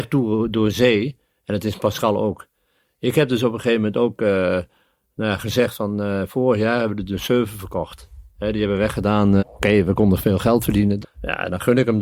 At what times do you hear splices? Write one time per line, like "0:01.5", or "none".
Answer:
0:09.4
0:11.0